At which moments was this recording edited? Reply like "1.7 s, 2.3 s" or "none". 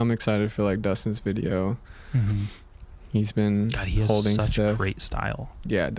none